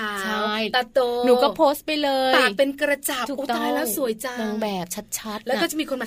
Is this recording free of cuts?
yes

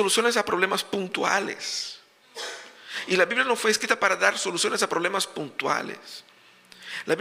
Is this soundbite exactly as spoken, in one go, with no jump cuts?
yes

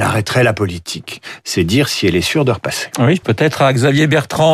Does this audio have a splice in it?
yes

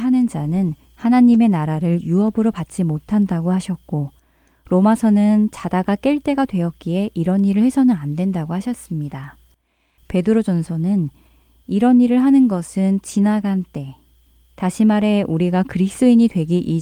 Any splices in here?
no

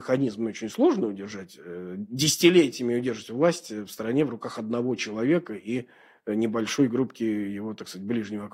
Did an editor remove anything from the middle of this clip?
no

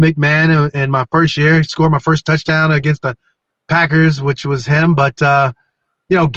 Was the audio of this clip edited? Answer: no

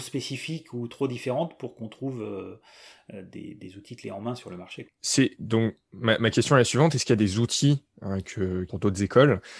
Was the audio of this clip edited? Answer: yes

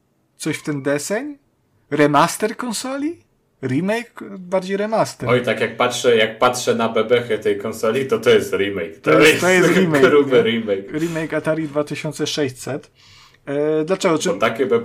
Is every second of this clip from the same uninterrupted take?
no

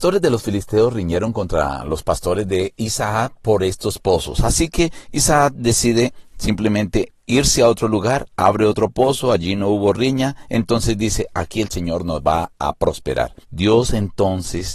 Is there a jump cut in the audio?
yes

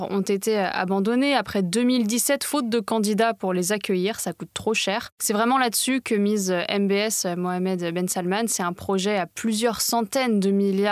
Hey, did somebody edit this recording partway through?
yes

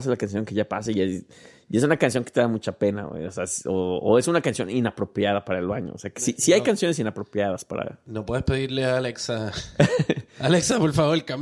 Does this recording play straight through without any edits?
yes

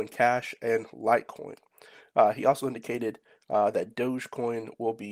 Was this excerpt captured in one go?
yes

